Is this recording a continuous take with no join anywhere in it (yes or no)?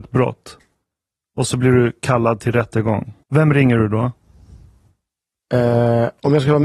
no